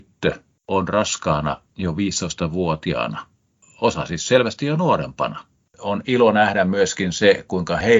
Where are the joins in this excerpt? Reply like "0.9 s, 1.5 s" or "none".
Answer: 5.7 s